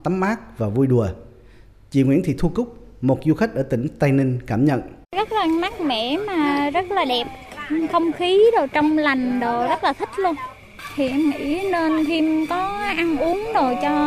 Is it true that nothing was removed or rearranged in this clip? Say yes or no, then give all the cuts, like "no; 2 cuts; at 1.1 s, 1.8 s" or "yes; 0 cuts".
no; 1 cut; at 5.0 s